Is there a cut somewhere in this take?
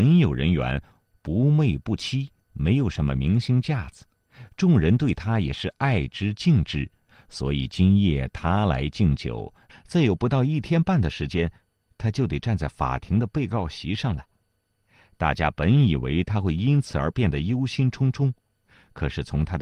yes; 1 cut; at 9.7 s

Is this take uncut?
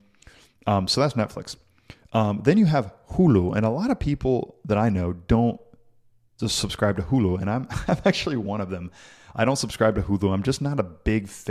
yes; 0 cuts

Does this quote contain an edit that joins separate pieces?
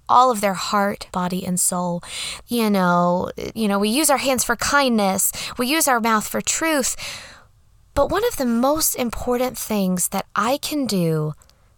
yes; 3 cuts; at 1.1 s, 2.4 s, 3.5 s

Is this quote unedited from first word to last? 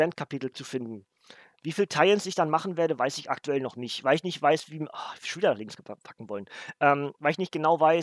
no; 1 cut; at 1.6 s

